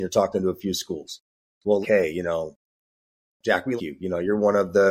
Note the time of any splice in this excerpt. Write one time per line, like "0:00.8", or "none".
0:01.8
0:03.8